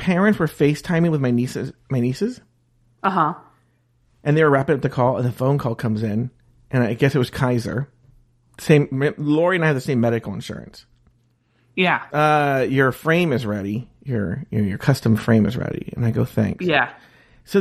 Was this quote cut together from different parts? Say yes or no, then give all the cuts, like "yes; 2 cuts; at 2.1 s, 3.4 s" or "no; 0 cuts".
yes; 1 cut; at 12.1 s